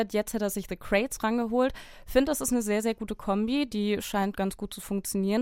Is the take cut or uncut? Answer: uncut